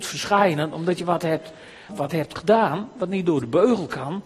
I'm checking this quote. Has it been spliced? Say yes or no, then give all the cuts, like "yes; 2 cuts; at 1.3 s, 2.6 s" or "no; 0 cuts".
yes; 1 cut; at 1.9 s